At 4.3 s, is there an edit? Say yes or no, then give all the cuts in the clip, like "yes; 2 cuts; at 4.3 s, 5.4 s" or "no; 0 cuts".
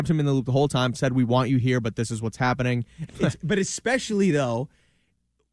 no; 2 cuts; at 0.9 s, 3.1 s